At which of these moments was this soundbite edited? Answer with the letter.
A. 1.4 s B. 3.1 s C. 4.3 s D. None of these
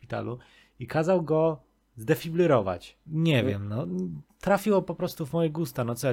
B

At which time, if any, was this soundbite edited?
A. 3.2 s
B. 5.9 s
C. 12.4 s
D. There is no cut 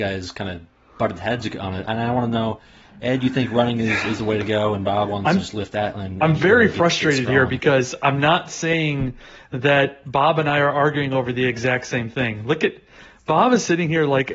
D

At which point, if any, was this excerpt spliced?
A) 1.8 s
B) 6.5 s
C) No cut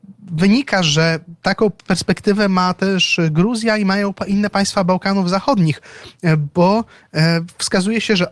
A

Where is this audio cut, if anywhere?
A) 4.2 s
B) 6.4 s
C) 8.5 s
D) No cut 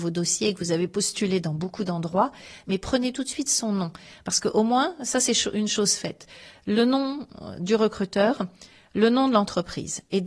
D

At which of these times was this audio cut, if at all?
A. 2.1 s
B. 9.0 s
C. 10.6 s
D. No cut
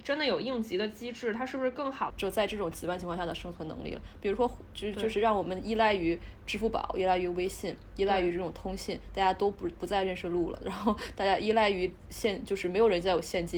A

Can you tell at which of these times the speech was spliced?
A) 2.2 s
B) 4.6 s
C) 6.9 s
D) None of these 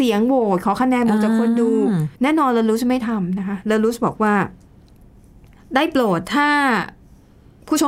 A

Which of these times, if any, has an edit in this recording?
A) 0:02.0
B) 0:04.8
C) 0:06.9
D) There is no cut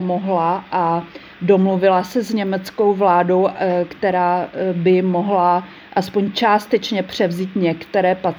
D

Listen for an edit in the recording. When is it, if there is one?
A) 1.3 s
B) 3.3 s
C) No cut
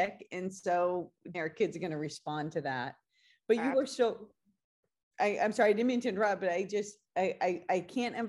A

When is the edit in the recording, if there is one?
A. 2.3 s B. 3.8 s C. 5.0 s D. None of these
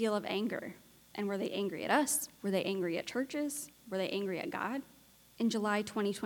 D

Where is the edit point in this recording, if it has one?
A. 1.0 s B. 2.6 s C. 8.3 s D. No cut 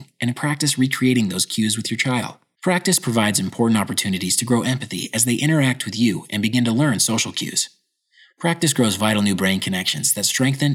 B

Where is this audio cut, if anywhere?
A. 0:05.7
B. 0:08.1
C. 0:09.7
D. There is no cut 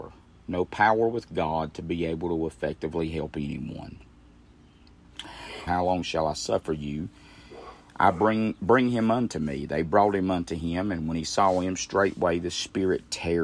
A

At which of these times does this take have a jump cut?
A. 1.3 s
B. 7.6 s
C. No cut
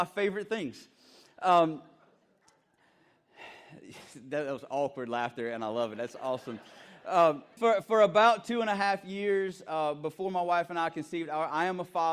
B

